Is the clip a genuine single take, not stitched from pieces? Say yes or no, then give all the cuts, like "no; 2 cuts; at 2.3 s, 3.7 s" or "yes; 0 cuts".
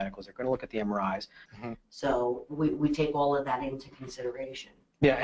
no; 1 cut; at 1.5 s